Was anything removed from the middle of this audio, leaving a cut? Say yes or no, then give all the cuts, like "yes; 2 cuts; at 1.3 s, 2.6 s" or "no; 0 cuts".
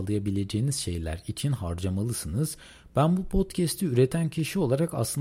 no; 0 cuts